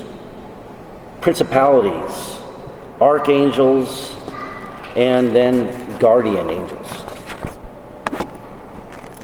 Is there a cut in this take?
yes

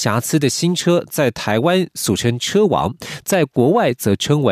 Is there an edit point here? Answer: no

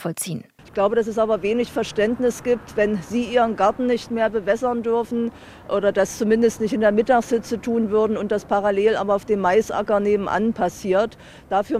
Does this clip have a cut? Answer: no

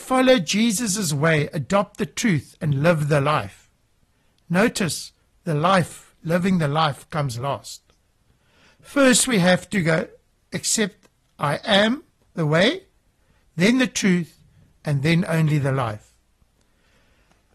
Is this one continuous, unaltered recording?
yes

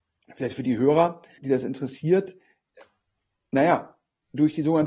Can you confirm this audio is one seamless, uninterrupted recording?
no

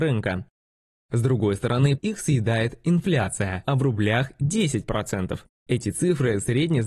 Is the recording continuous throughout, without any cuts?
no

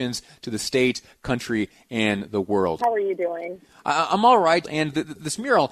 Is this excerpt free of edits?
no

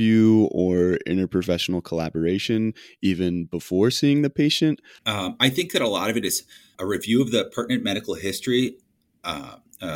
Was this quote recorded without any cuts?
no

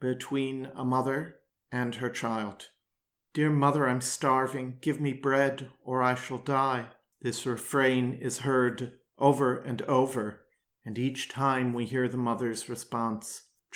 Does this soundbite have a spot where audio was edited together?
no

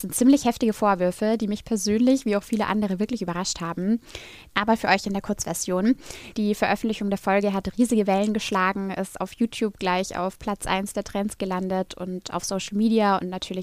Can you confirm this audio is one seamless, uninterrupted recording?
no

